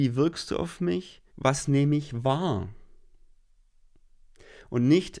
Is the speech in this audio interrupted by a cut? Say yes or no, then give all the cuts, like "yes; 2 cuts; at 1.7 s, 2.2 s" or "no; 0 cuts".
yes; 1 cut; at 1.3 s